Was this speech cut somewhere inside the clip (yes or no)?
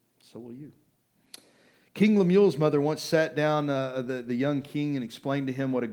no